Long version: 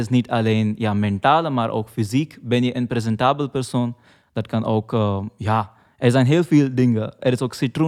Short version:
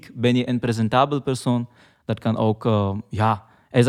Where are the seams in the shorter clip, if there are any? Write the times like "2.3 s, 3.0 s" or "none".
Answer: none